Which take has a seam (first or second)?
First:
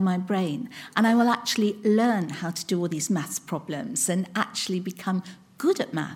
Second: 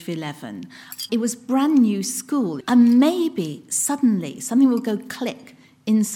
second